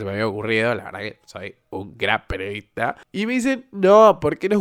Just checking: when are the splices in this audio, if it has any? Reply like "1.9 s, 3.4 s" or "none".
3.0 s